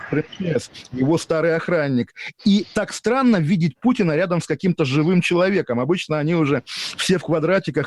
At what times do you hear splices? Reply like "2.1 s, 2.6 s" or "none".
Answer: none